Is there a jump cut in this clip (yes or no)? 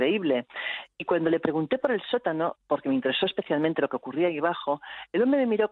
no